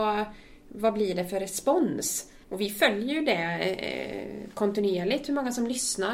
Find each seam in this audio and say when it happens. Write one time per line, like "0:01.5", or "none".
0:02.4